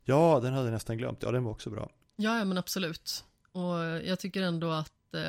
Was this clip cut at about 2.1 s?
yes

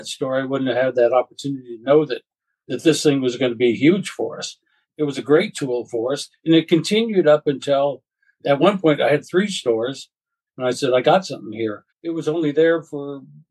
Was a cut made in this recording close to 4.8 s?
yes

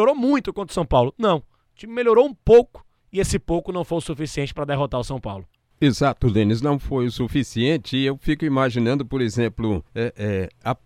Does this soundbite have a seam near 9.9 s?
yes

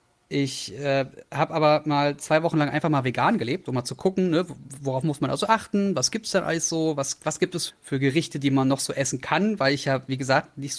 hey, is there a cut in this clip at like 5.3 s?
no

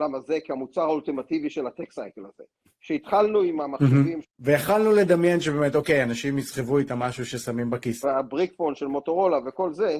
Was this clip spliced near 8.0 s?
yes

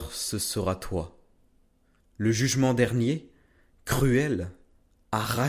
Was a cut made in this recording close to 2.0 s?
yes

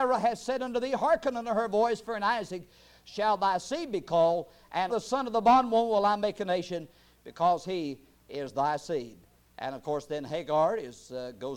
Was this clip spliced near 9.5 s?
no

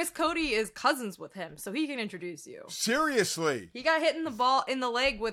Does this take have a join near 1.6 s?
no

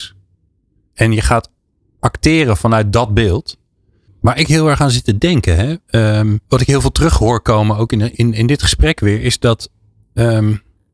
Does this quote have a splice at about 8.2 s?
no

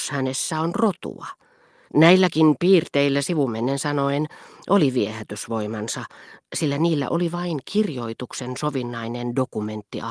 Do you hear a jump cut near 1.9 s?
yes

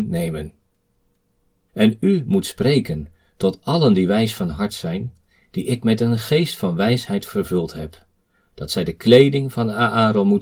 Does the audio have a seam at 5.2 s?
no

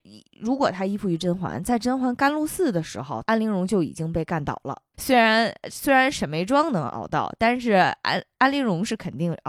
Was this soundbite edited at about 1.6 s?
no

